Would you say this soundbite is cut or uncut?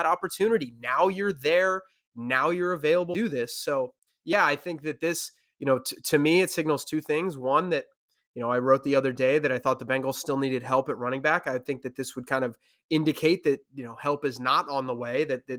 uncut